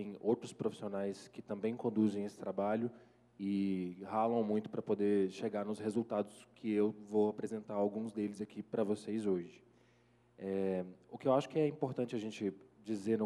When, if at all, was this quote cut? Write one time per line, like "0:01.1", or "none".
none